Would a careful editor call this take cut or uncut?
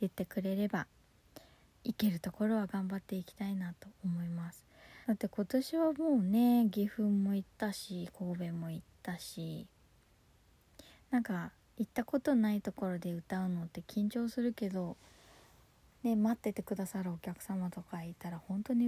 cut